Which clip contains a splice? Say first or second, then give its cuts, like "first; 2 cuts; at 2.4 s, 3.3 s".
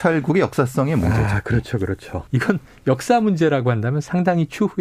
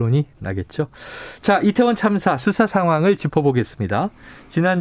first; 1 cut; at 2.3 s